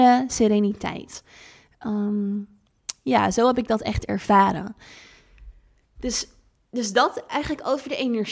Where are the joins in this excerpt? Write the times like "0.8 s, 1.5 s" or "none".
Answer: none